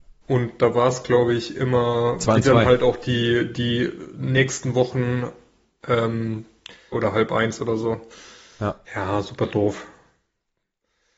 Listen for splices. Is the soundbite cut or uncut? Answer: cut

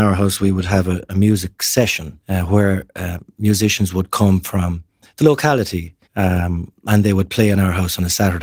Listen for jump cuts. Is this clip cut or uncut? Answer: cut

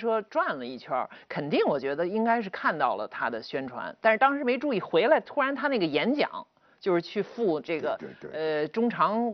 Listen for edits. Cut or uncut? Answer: uncut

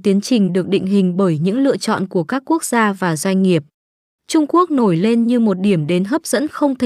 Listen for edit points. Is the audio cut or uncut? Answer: uncut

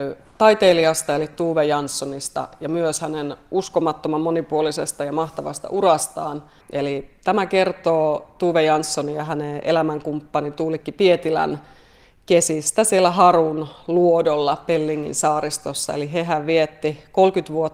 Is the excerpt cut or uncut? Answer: cut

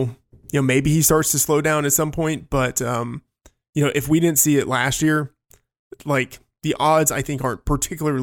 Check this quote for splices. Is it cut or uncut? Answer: uncut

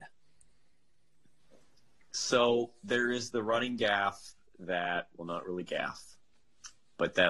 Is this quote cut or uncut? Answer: uncut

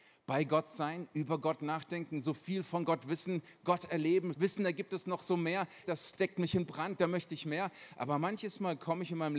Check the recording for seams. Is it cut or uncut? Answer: cut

